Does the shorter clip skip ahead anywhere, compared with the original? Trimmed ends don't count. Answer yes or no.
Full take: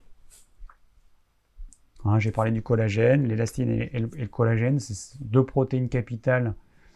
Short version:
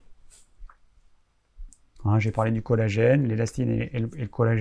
no